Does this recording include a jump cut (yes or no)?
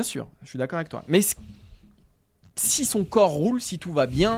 no